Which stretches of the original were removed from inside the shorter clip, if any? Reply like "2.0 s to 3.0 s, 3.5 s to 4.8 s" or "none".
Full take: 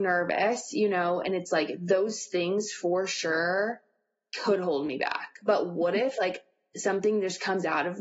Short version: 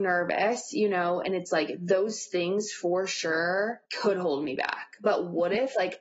3.9 s to 4.3 s